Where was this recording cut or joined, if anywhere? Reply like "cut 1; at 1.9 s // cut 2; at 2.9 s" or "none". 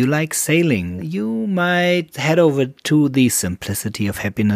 cut 1; at 1.0 s // cut 2; at 2.1 s